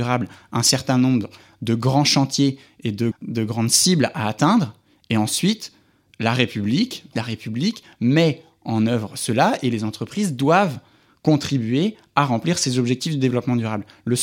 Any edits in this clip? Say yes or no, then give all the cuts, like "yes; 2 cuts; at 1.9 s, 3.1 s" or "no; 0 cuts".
yes; 2 cuts; at 3.1 s, 7.1 s